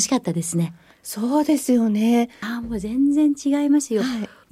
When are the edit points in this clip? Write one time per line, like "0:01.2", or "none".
0:02.4